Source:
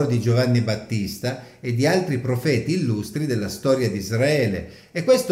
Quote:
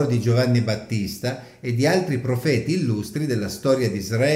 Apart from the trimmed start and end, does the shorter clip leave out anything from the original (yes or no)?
no